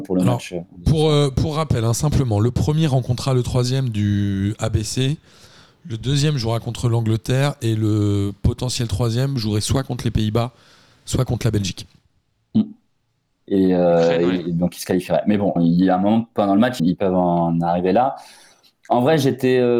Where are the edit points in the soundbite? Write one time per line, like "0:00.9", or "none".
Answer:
0:13.5
0:15.6
0:16.8